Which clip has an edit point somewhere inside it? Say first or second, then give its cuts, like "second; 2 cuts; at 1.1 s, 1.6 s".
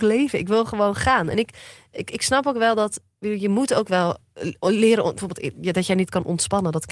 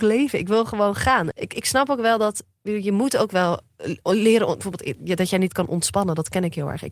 second; 1 cut; at 1.3 s